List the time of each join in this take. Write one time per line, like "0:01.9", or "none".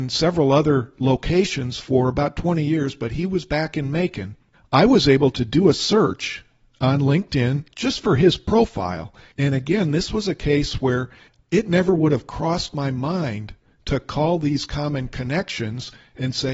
0:09.3